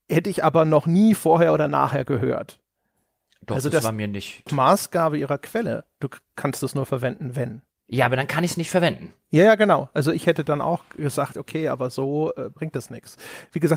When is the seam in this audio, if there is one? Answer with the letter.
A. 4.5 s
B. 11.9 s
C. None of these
A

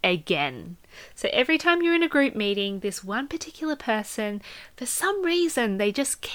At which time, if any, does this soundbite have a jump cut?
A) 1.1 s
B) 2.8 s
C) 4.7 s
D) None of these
D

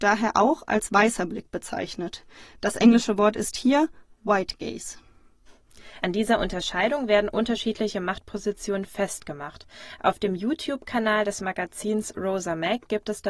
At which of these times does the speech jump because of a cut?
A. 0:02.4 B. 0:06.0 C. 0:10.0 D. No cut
B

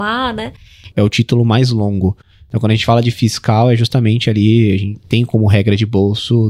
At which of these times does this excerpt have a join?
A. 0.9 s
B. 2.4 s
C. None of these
A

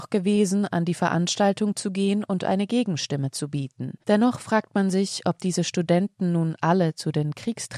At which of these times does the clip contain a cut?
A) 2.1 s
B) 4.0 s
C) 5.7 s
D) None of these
B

